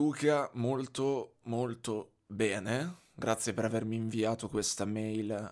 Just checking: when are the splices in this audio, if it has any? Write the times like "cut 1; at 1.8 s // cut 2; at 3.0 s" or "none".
cut 1; at 1.4 s

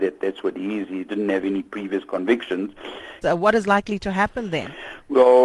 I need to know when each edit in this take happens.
cut 1; at 3.2 s

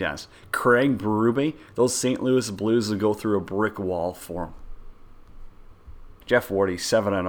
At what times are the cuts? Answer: cut 1; at 6.2 s

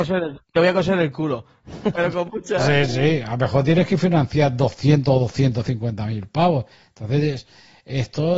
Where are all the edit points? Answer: cut 1; at 1.9 s

